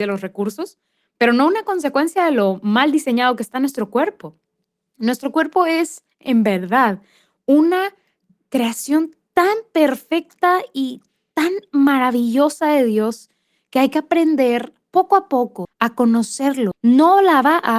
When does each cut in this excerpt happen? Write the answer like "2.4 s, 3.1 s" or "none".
15.6 s, 16.7 s